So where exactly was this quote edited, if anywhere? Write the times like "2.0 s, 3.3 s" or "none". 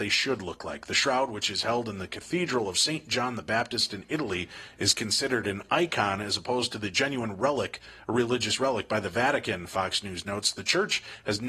none